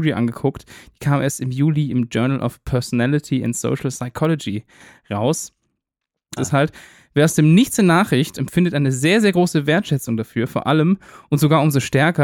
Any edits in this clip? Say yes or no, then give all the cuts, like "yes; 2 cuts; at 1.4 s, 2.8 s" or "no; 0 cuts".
yes; 2 cuts; at 6.4 s, 8.4 s